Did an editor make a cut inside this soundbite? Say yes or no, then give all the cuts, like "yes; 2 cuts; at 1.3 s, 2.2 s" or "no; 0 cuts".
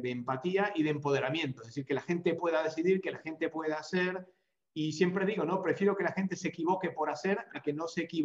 no; 0 cuts